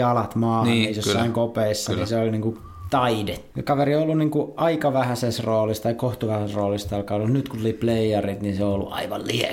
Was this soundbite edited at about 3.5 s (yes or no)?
yes